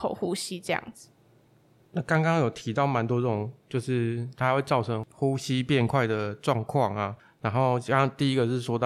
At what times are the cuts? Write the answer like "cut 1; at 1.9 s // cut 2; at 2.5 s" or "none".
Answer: none